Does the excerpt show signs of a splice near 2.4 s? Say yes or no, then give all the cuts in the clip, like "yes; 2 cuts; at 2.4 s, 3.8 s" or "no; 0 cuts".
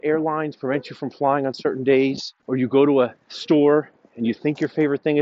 yes; 1 cut; at 2.4 s